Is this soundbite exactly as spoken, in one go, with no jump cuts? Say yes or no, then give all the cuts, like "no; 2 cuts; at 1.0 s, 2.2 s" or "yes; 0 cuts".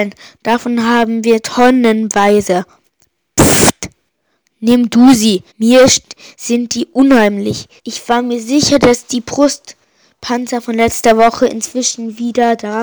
no; 2 cuts; at 5.5 s, 7.8 s